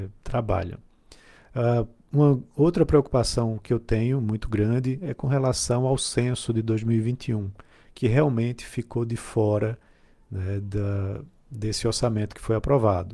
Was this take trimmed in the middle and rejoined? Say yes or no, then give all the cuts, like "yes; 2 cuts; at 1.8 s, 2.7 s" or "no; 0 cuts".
no; 0 cuts